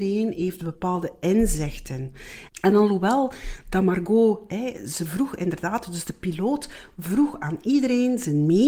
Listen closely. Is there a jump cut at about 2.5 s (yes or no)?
yes